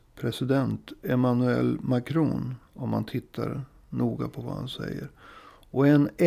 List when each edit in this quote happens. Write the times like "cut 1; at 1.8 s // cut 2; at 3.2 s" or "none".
none